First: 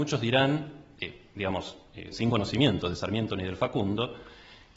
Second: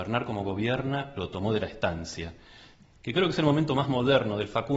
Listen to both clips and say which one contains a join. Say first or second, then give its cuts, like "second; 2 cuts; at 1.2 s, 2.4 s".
first; 1 cut; at 2.1 s